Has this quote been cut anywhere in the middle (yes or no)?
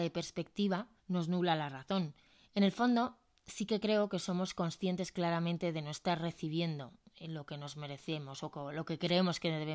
yes